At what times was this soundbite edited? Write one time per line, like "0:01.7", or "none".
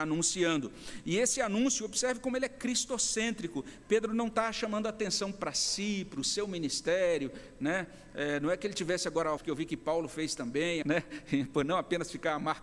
0:09.4
0:10.8